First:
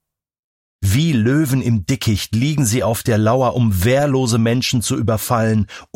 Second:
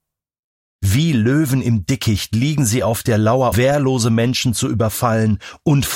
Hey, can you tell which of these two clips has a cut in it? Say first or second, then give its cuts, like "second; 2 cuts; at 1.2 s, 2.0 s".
second; 1 cut; at 3.5 s